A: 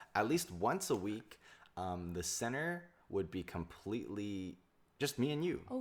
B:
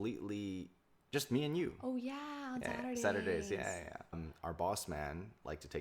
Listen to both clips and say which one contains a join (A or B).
B